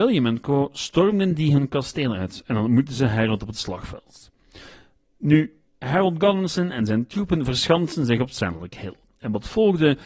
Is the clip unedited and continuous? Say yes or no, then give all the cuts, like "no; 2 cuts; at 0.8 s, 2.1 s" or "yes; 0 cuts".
no; 1 cut; at 5.7 s